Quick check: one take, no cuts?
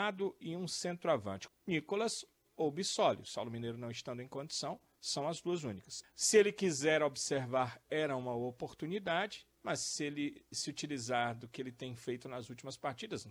no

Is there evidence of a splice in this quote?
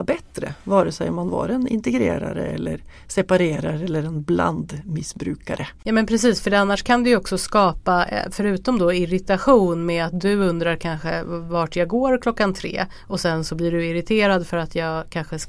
yes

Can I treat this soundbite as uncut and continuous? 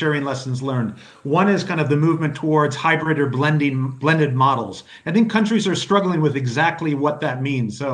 yes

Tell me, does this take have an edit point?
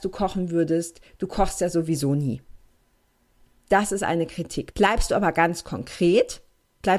yes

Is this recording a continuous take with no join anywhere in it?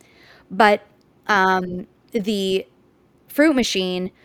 yes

